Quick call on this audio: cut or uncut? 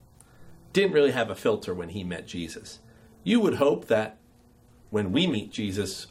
uncut